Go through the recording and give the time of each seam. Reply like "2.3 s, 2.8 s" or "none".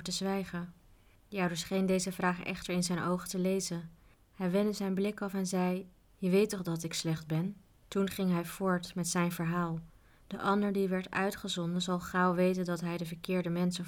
none